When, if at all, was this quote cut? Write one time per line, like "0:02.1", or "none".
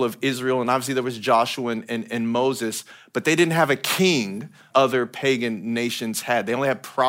0:04.7